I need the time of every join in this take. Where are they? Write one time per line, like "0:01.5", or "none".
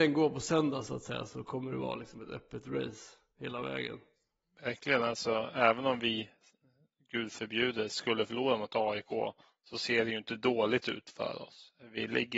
none